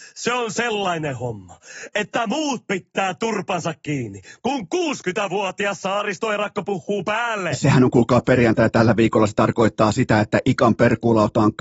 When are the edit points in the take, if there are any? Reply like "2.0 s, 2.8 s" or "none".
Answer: none